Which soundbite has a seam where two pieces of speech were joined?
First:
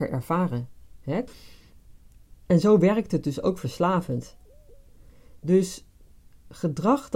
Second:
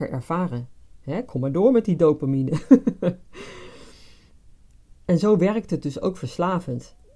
first; 1 cut; at 1.3 s

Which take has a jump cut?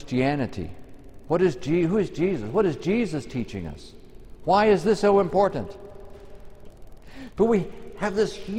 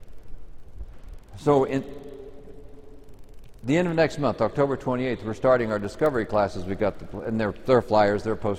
first; 1 cut; at 6.7 s

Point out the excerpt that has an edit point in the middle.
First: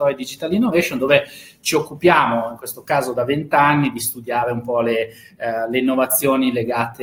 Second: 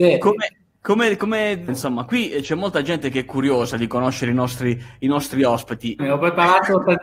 second; 2 cuts; at 1.7 s, 6.0 s

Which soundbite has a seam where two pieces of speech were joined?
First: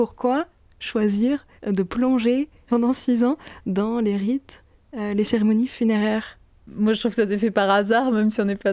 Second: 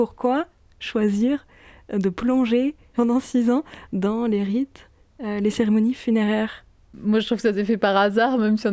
first; 1 cut; at 1.6 s

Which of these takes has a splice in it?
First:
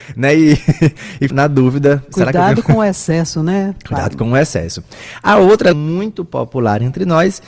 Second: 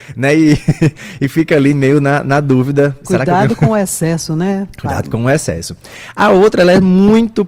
first; 2 cuts; at 1.3 s, 5.7 s

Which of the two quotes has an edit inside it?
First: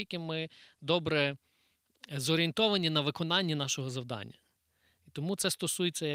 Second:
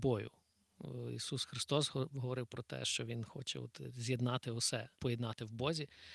second; 1 cut; at 4.9 s

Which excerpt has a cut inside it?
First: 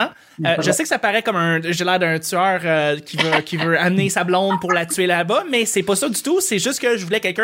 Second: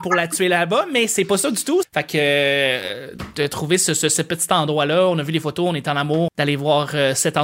second; 2 cuts; at 1.8 s, 6.3 s

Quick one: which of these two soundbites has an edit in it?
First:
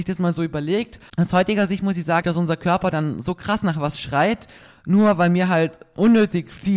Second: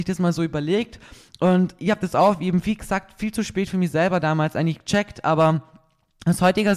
first; 2 cuts; at 1.1 s, 2.2 s

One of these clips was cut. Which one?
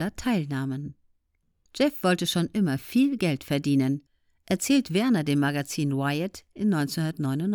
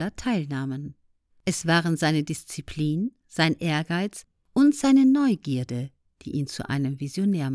second; 1 cut; at 1.3 s

